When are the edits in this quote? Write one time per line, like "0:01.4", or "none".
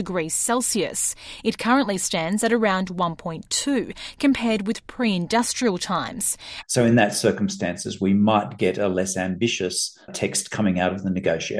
0:06.6
0:10.1

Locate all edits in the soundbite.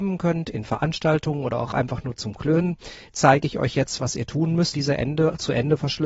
0:04.7

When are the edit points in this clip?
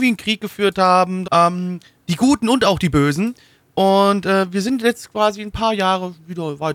0:01.2

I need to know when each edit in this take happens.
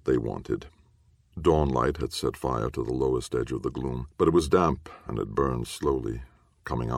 0:01.3
0:04.1

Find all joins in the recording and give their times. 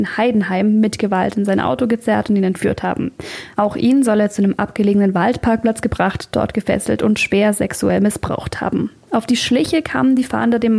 none

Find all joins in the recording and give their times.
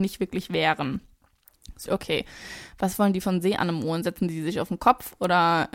0:01.9

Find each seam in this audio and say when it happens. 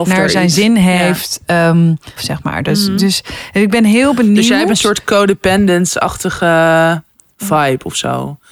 0:02.2

